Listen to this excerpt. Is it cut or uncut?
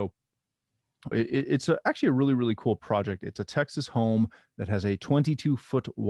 cut